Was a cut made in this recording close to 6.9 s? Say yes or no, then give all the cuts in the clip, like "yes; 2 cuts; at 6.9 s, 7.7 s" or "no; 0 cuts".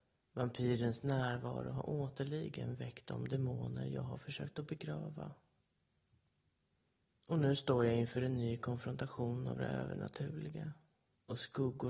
no; 0 cuts